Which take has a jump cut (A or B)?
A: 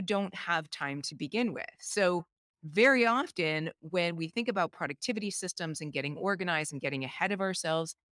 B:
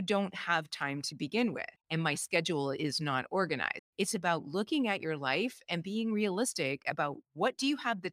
B